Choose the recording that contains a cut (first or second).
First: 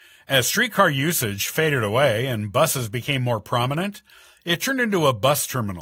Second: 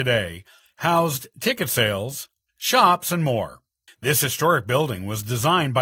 second